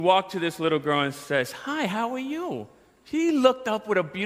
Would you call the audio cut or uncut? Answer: uncut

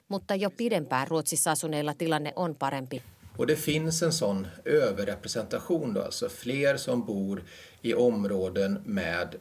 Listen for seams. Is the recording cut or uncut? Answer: cut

